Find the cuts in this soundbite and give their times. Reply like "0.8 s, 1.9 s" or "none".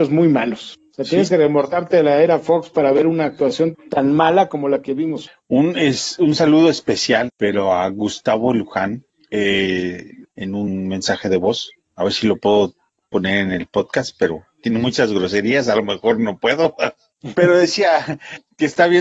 3.7 s, 7.3 s, 10.2 s